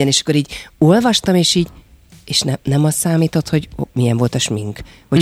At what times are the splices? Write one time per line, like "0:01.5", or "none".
none